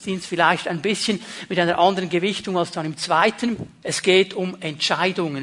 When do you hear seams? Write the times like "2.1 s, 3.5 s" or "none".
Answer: 3.8 s